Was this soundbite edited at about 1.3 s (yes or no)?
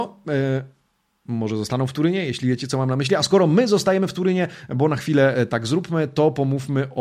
yes